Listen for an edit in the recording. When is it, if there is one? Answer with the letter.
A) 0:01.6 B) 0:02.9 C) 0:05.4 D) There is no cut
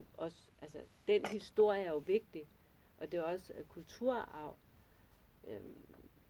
C